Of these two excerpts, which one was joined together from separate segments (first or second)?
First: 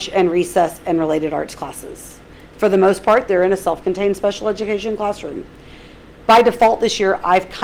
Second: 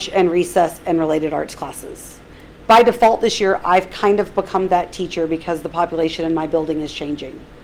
second